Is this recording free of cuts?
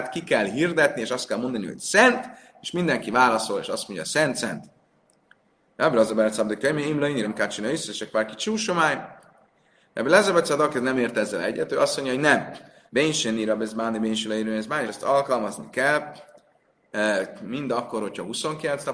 no; 3 cuts; at 7.2 s, 12.9 s, 14.9 s

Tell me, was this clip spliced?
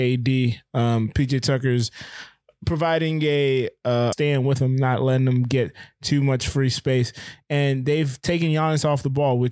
yes; 1 cut; at 4.1 s

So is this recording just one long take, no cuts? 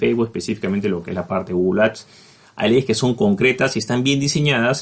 yes; 0 cuts

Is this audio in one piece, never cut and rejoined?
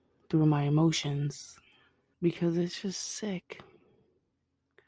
no; 1 cut; at 2.1 s

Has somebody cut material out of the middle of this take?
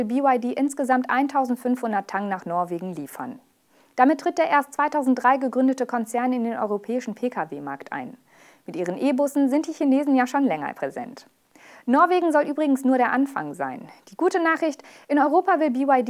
no; 0 cuts

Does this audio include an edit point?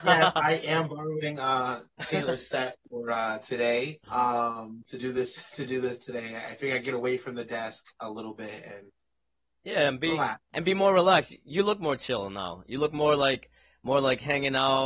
yes; 1 cut; at 4.0 s

